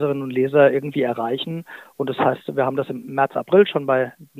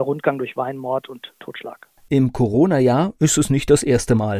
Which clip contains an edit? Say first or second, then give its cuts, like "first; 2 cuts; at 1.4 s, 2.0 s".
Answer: second; 1 cut; at 2.1 s